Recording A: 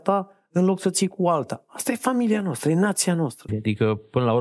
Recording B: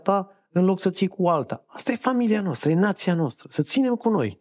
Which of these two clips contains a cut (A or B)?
A